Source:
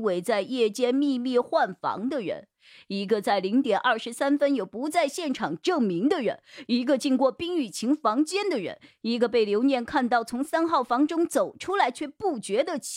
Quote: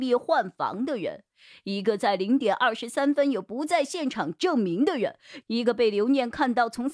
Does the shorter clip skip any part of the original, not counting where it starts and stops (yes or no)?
yes